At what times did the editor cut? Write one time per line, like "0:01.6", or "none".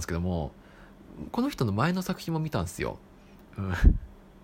0:03.4